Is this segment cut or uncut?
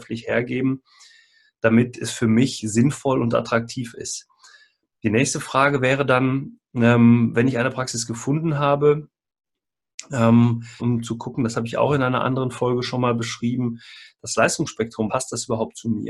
cut